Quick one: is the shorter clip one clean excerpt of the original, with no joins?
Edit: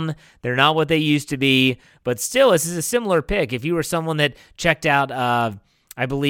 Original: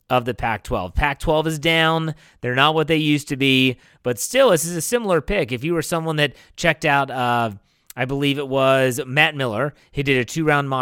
yes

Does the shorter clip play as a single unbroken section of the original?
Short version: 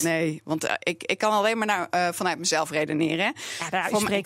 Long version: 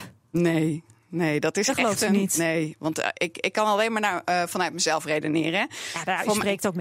yes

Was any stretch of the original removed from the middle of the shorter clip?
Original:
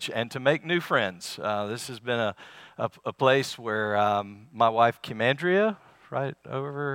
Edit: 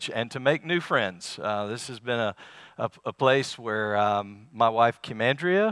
no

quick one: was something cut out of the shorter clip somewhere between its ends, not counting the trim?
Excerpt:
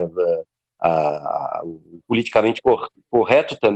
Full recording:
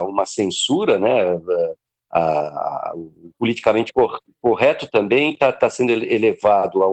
no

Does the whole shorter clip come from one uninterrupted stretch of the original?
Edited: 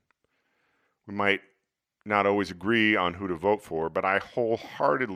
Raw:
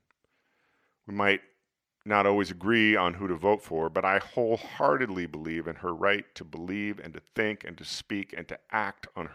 yes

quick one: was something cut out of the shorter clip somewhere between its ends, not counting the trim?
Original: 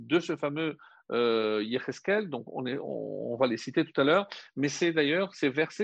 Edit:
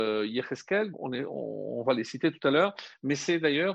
yes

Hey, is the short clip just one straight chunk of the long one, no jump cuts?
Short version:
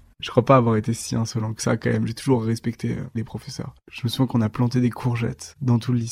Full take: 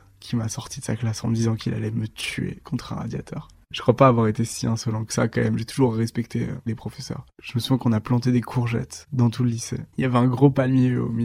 yes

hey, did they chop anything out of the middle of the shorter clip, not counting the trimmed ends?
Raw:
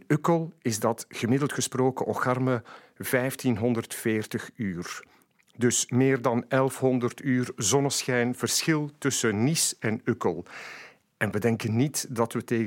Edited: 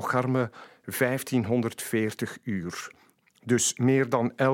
no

